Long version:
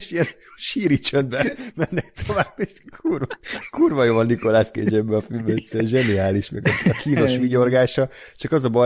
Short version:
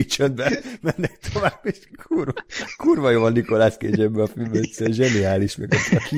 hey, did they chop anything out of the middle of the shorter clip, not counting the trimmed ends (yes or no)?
no